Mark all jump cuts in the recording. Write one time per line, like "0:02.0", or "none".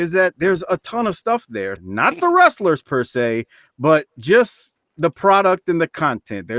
0:01.8